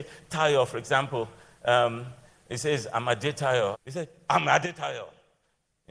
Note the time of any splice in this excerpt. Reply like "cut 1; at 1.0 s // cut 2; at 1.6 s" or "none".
cut 1; at 3.7 s